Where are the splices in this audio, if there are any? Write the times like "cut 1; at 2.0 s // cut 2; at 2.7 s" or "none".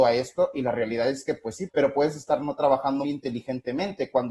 cut 1; at 1.7 s // cut 2; at 3.0 s